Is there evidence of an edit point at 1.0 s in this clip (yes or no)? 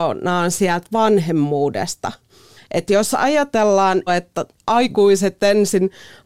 no